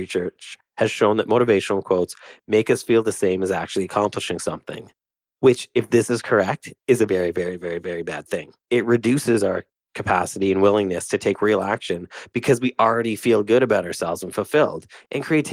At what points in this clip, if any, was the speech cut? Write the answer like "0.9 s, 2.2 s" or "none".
7.1 s